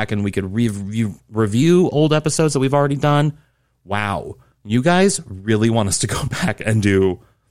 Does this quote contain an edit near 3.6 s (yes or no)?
no